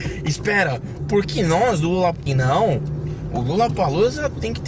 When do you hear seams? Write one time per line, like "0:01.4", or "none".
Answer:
0:01.2
0:02.3

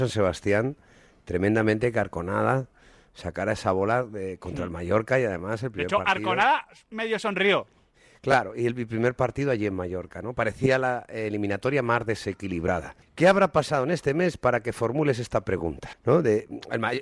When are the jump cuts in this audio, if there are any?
0:13.0
0:15.9

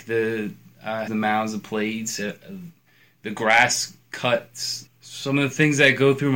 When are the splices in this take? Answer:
0:01.1
0:04.9

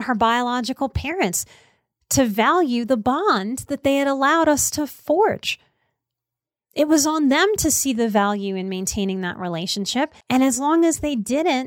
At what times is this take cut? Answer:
0:10.2

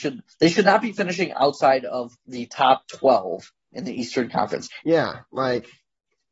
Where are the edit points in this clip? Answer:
0:02.2
0:04.8

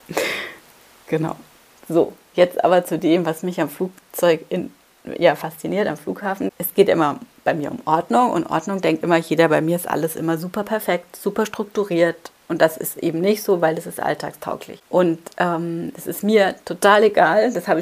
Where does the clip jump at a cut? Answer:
none

